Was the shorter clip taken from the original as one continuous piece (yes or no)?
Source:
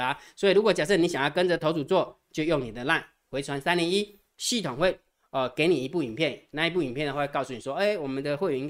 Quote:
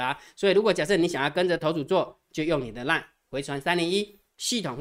yes